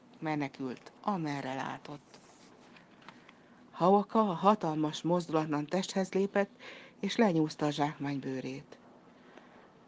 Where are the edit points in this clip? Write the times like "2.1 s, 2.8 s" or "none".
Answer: none